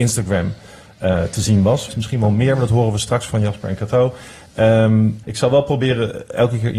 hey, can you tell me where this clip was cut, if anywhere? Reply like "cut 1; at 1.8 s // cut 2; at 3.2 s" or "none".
cut 1; at 1.9 s // cut 2; at 5.2 s